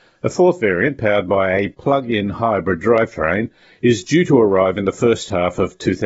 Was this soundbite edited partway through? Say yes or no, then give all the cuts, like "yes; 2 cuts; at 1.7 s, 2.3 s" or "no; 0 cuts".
no; 0 cuts